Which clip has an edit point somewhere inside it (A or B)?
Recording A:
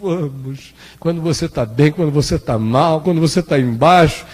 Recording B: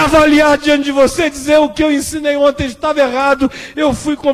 A